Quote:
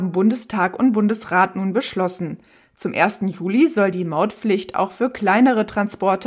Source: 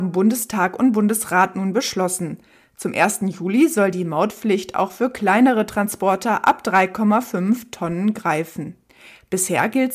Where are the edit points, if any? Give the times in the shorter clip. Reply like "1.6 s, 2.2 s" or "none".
none